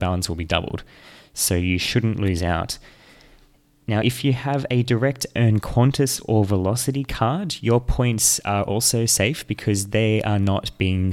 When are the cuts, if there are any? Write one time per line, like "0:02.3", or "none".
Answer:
none